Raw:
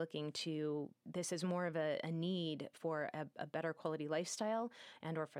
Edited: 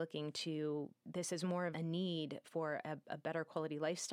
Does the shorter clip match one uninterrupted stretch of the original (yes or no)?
no